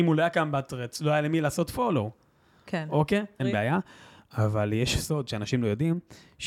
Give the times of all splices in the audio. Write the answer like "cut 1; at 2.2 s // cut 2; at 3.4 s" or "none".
cut 1; at 3.4 s